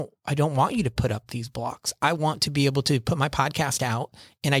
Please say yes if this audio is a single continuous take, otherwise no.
yes